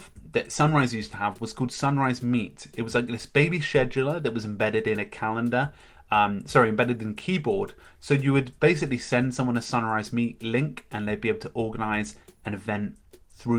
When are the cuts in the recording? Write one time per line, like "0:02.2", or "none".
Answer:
none